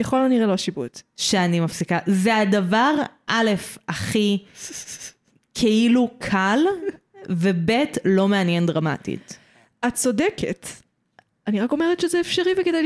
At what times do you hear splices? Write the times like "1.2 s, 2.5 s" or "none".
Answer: none